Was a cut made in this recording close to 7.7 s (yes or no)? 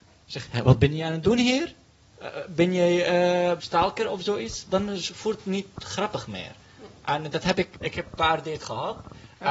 yes